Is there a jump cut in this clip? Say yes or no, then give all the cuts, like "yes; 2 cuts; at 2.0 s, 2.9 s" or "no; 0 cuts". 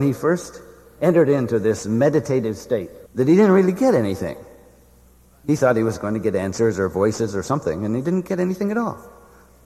yes; 1 cut; at 3.1 s